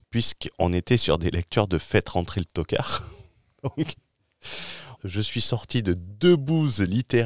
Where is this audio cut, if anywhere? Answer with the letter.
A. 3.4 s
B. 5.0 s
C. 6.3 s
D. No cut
B